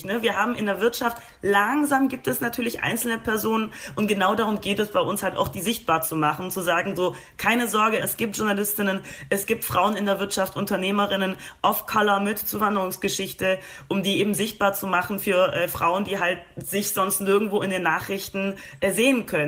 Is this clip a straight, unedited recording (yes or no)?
no